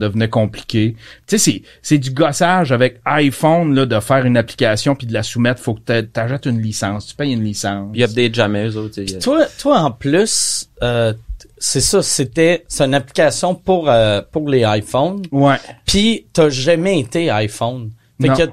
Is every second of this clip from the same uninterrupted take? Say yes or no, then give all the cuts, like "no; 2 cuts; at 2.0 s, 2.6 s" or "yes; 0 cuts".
yes; 0 cuts